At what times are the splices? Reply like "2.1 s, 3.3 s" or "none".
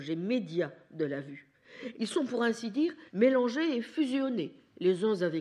1.9 s, 3.1 s